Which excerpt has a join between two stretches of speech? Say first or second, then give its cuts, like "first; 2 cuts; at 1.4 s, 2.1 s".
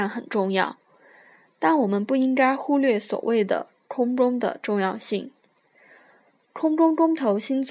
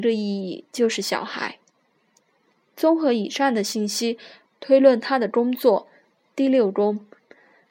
second; 1 cut; at 4.5 s